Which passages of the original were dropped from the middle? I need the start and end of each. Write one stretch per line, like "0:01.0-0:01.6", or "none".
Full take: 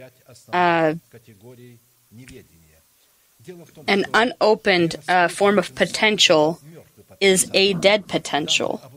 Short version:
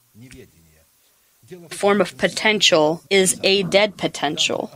0:03.7-0:05.3
0:06.6-0:07.2